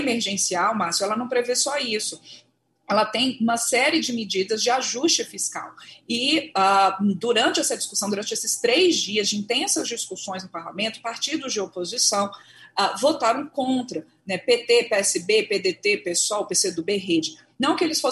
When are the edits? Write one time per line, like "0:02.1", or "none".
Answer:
none